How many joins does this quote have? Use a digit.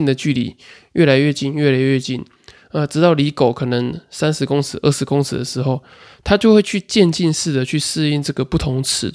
0